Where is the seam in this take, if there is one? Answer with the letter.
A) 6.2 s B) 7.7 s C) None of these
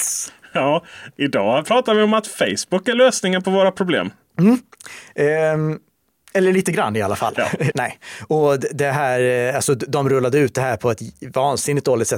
B